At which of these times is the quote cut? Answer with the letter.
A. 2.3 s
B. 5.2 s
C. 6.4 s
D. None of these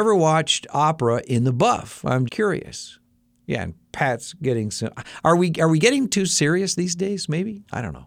A